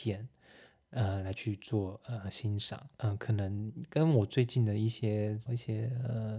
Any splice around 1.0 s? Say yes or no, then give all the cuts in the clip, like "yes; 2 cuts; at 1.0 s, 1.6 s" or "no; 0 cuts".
no; 2 cuts; at 2.9 s, 5.5 s